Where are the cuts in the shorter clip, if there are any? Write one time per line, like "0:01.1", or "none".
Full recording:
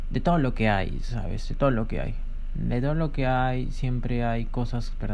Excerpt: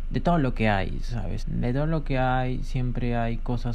0:01.4